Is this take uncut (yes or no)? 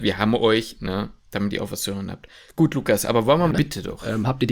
no